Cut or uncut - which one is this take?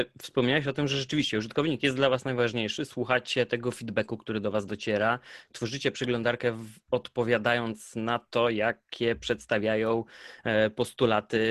uncut